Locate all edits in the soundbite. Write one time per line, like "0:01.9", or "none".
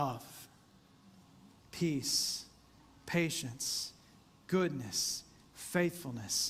0:01.6
0:04.2